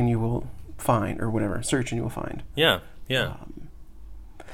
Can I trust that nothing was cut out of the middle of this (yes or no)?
yes